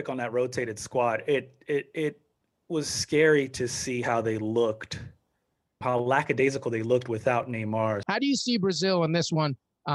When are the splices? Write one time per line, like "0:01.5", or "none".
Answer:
0:05.8
0:08.0